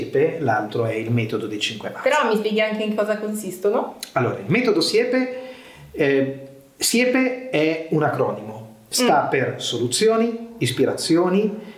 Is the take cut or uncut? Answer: uncut